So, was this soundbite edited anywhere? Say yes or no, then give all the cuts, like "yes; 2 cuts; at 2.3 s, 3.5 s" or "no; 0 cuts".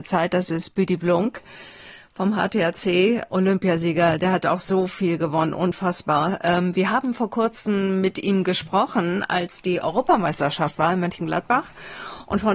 yes; 1 cut; at 3.3 s